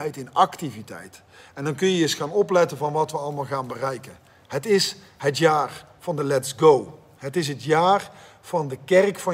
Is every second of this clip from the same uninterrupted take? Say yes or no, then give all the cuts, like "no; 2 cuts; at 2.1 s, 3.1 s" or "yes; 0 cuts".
yes; 0 cuts